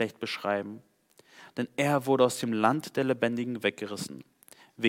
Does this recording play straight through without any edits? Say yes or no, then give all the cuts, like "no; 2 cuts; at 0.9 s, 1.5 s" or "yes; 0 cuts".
yes; 0 cuts